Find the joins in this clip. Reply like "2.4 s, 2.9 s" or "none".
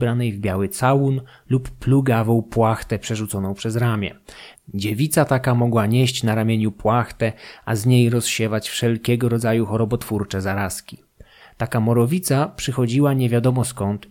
4.5 s, 11.4 s